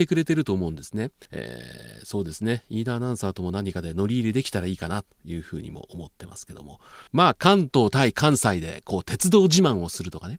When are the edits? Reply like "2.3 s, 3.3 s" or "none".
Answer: 1.3 s, 7.1 s